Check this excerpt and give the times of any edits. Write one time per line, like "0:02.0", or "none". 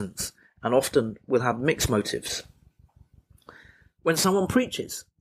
none